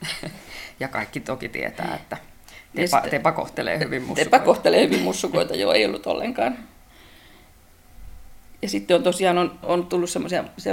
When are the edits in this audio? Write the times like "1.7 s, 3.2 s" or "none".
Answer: 8.6 s, 9.6 s